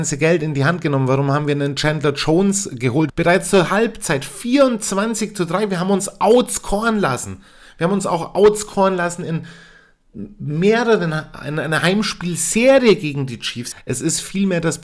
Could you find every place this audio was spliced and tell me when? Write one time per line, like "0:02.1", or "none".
0:03.1
0:13.7